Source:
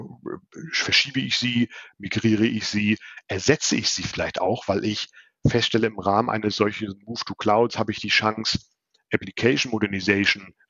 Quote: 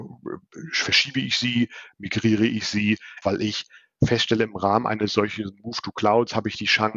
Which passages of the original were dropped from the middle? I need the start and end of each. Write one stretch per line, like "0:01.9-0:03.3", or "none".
0:03.2-0:04.6